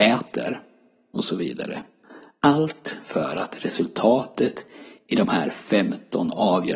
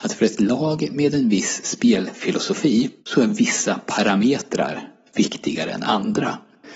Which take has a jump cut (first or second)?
second